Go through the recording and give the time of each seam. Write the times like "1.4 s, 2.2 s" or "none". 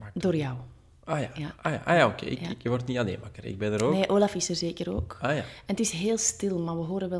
none